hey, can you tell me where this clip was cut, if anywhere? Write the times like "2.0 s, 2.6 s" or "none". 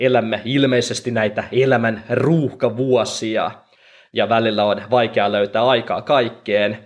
none